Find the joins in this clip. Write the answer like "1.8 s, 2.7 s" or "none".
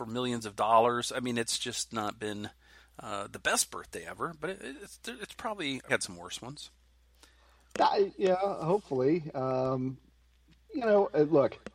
5.9 s